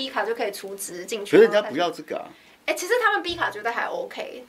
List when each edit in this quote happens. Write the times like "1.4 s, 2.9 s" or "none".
none